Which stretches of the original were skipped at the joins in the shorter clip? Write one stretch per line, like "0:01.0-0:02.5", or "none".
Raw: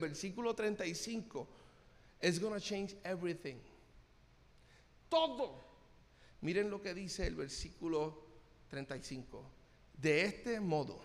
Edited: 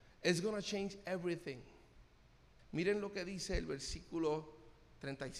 0:04.6-0:06.3